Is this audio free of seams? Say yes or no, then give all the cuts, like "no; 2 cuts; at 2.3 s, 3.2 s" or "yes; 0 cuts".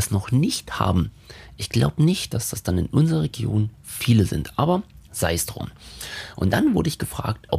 yes; 0 cuts